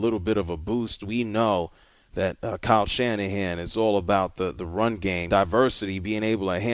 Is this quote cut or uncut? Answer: cut